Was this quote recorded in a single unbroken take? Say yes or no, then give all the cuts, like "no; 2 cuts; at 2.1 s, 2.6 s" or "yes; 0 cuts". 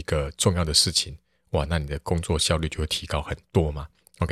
yes; 0 cuts